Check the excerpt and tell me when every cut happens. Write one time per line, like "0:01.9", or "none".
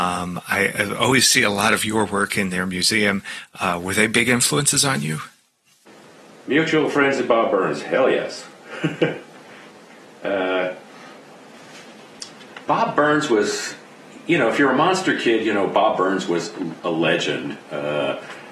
0:12.6